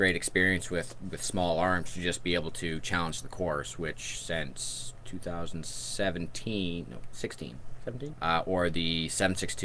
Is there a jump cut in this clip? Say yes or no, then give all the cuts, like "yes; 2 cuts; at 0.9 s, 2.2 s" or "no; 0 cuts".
yes; 1 cut; at 8.1 s